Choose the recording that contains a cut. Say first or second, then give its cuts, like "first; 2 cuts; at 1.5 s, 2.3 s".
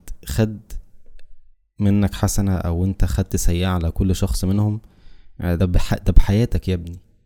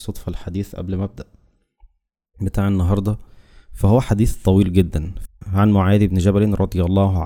first; 1 cut; at 5.6 s